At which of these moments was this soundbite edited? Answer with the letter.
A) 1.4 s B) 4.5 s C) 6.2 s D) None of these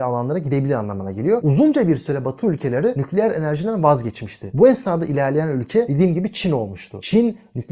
A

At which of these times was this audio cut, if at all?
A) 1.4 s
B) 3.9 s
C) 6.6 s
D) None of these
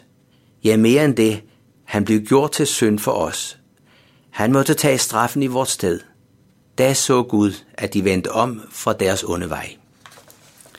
C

